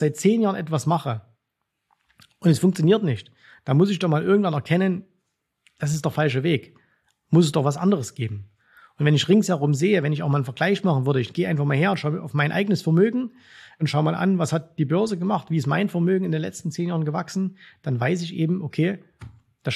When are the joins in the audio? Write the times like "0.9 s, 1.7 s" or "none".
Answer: none